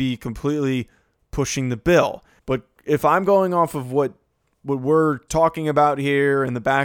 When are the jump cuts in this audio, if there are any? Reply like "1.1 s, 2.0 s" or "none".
2.4 s, 5.3 s